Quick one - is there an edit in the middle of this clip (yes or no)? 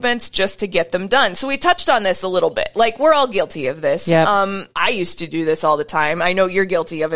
yes